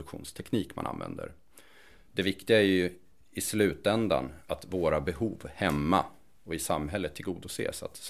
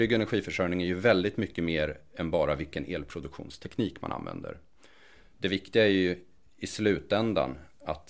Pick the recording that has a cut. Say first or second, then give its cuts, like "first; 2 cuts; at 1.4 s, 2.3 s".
first; 1 cut; at 4.4 s